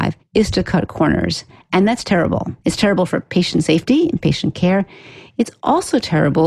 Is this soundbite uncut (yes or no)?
yes